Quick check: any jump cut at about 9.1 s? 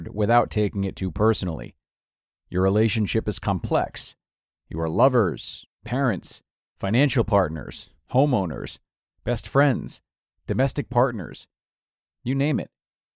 no; 1 cut; at 2.3 s

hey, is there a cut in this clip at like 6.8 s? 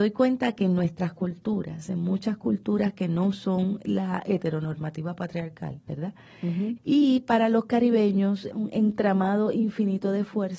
yes; 2 cuts; at 6.8 s, 8.5 s

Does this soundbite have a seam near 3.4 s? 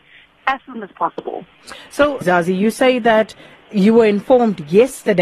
no; 1 cut; at 2.2 s

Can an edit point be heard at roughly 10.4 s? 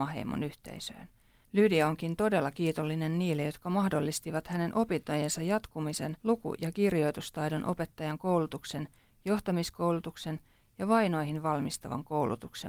no; 2 cuts; at 1.4 s, 6.2 s

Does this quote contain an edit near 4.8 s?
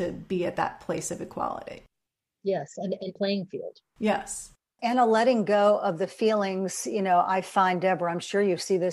yes; 2 cuts; at 3.2 s, 4.8 s

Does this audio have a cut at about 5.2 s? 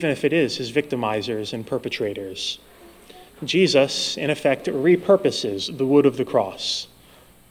no; 1 cut; at 3.3 s

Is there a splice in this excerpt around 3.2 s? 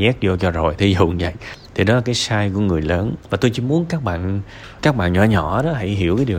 yes; 2 cuts; at 3.2 s, 4.8 s

